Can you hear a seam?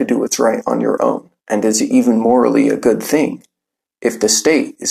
yes; 1 cut; at 1.4 s

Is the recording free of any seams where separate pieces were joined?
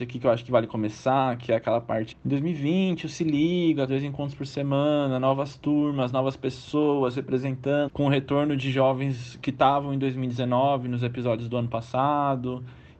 no; 3 cuts; at 2.1 s, 3.9 s, 7.9 s

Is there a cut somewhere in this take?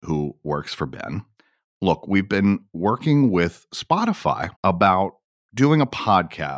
yes; 2 cuts; at 1.6 s, 4.5 s

